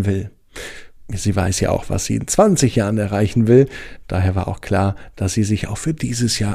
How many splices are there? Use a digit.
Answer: 0